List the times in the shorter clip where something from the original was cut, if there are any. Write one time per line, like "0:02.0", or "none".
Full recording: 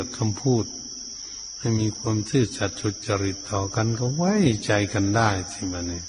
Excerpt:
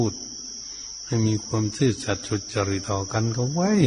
0:02.8